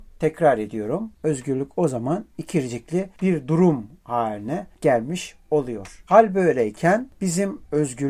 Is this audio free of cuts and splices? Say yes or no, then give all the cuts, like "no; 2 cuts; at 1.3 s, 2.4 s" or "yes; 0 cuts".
yes; 0 cuts